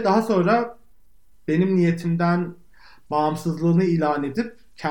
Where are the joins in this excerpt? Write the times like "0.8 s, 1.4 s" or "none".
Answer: none